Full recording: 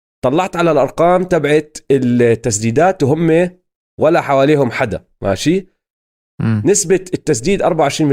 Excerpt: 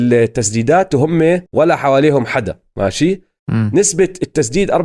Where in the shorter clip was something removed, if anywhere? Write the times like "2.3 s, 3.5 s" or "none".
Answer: 1.5 s, 3.4 s